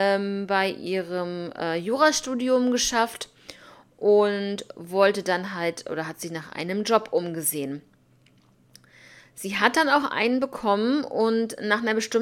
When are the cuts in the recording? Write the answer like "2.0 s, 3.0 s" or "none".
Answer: none